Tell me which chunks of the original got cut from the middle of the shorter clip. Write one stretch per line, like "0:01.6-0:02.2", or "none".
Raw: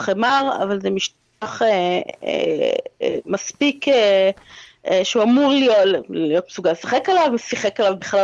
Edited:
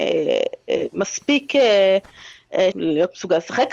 0:05.0-0:06.1